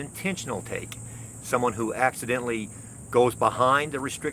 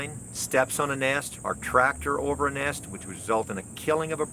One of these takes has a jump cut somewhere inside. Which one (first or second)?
second